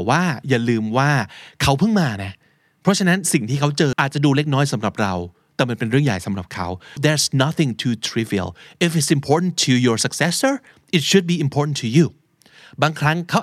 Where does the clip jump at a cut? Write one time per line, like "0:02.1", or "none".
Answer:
0:03.9
0:07.0